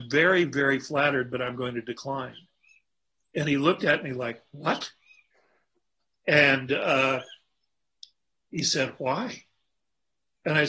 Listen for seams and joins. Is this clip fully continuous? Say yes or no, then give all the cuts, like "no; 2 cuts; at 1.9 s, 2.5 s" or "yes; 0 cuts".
yes; 0 cuts